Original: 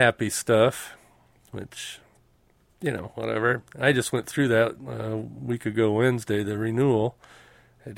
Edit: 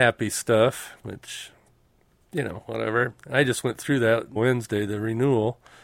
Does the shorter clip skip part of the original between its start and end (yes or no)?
yes